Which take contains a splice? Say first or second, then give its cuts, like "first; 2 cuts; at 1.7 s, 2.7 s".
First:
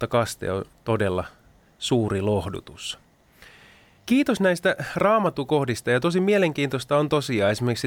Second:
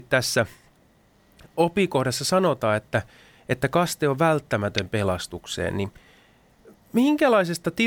first; 1 cut; at 4.0 s